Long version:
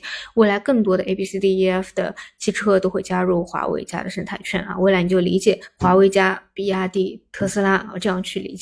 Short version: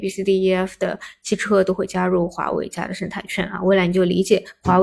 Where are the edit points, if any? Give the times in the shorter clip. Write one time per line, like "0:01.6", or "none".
none